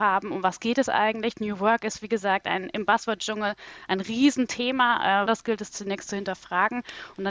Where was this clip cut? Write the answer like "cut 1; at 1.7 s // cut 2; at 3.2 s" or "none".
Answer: cut 1; at 5.3 s